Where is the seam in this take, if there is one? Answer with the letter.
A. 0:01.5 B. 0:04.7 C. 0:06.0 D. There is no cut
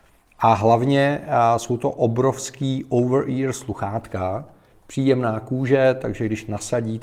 B